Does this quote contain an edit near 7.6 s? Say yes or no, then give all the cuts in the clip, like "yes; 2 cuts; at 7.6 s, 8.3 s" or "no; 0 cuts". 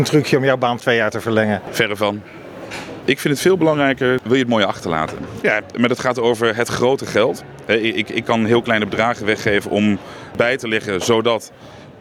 no; 2 cuts; at 3.0 s, 5.4 s